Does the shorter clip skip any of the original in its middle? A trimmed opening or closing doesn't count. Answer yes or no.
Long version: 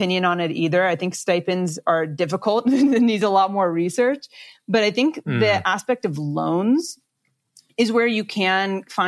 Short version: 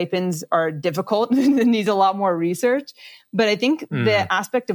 no